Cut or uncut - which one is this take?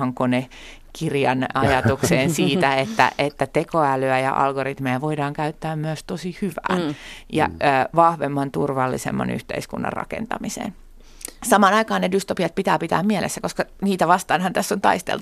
uncut